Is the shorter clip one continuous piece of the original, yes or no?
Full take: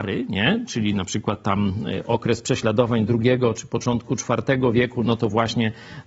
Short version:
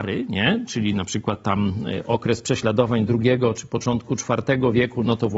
yes